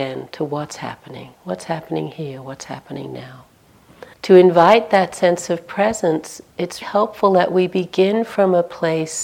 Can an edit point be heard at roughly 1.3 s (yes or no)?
yes